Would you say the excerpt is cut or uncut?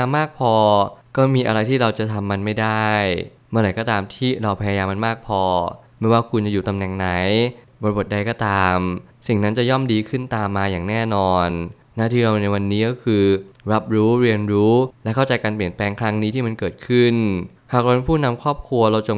uncut